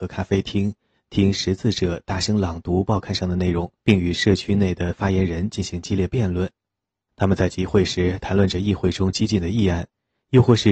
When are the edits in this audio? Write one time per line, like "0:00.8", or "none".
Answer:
0:03.8
0:07.1